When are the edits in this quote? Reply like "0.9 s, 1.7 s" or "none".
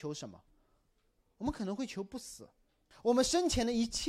2.9 s